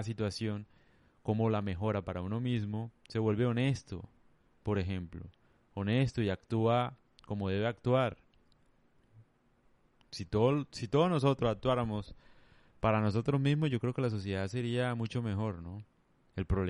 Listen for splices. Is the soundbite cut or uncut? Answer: uncut